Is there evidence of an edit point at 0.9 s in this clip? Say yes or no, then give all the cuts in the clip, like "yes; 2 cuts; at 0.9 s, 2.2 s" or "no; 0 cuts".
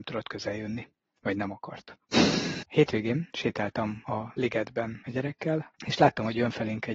no; 2 cuts; at 2.6 s, 5.8 s